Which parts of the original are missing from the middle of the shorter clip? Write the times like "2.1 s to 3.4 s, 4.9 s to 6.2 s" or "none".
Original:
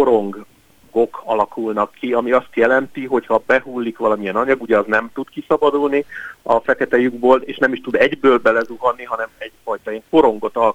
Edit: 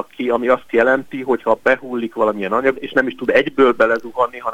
4.6 s to 7.4 s

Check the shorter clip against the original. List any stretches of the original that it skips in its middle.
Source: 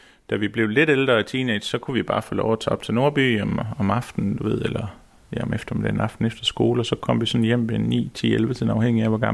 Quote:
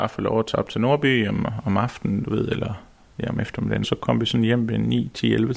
5.9 s to 6.8 s

